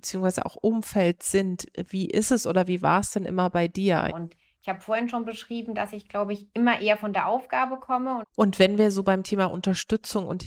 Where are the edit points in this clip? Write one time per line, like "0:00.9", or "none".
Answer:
0:04.1
0:08.2